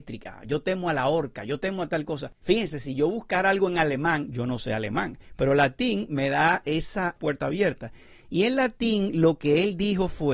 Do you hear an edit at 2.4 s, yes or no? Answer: yes